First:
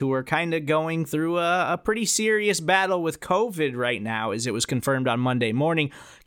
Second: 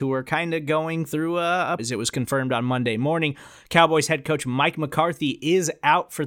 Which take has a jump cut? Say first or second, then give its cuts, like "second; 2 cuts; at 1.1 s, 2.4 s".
second; 1 cut; at 1.8 s